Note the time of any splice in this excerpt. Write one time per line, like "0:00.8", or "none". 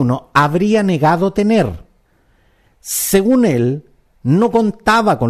0:02.7